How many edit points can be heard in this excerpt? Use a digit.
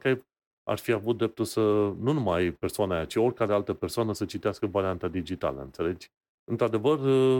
1